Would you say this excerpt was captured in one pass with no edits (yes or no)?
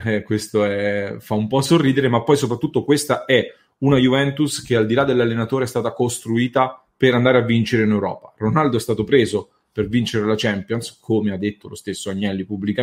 yes